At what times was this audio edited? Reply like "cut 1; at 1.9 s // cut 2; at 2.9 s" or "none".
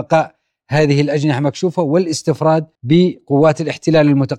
cut 1; at 2.7 s

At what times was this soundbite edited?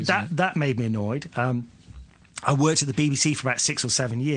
none

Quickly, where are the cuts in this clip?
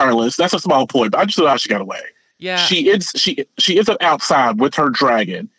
none

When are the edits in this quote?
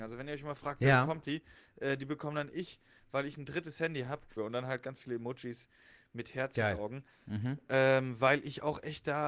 cut 1; at 4.4 s // cut 2; at 7.1 s

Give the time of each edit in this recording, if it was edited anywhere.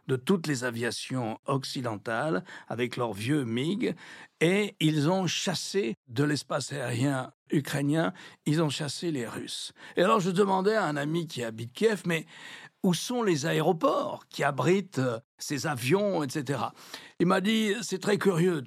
none

